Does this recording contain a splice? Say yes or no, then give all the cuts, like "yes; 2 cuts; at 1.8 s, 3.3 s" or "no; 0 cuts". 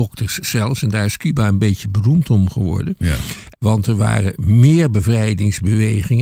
yes; 1 cut; at 3.5 s